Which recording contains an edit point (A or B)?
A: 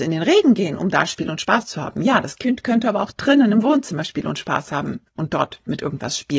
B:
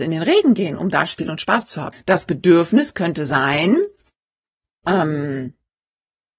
B